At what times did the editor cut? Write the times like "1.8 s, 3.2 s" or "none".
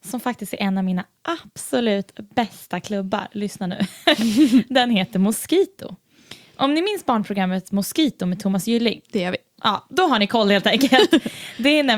none